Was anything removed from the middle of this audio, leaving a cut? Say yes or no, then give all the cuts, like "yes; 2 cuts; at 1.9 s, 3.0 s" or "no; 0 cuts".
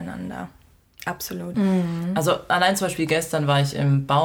yes; 1 cut; at 1.5 s